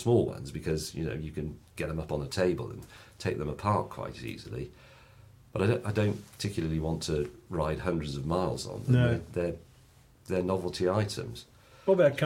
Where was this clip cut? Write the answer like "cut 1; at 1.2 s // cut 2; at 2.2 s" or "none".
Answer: none

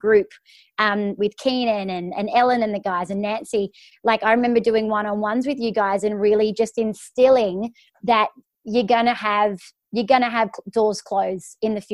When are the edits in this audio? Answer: none

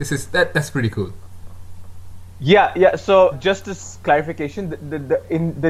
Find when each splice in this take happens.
cut 1; at 3.3 s

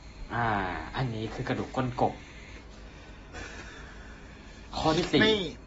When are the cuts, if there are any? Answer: cut 1; at 3.3 s

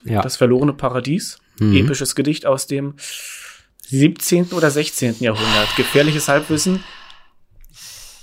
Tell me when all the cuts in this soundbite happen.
none

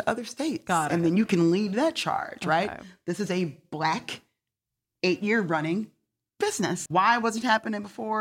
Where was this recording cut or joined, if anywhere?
cut 1; at 6.9 s

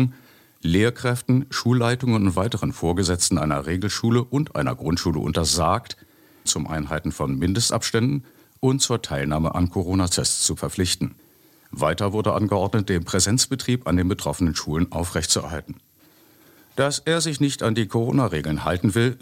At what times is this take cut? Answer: cut 1; at 6.4 s

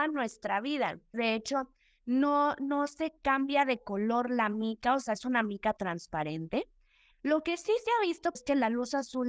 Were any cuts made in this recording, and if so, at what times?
cut 1; at 1.1 s // cut 2; at 7.1 s // cut 3; at 8.3 s

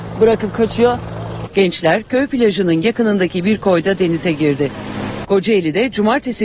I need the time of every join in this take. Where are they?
cut 1; at 1.5 s // cut 2; at 5.2 s

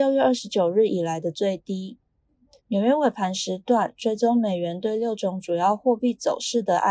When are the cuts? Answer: cut 1; at 2.6 s

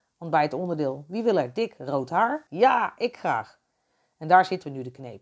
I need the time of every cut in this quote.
cut 1; at 2.5 s

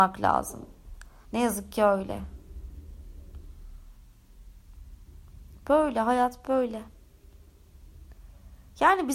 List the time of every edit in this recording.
cut 1; at 1.2 s

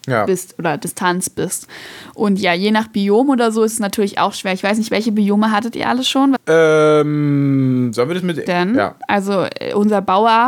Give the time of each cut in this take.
cut 1; at 6.4 s // cut 2; at 8.5 s

